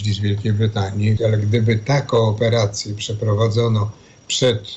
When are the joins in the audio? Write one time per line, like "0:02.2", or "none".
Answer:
0:01.2